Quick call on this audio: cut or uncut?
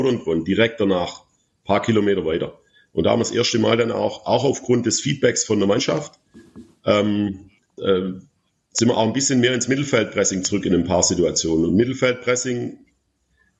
cut